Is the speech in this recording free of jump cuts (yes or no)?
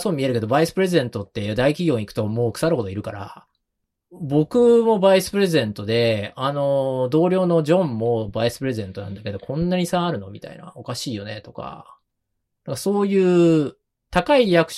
yes